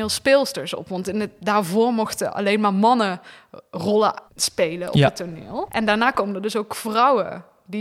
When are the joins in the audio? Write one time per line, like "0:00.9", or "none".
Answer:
0:04.3
0:05.7